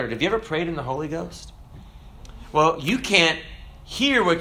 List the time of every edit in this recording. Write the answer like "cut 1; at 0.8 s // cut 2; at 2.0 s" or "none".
none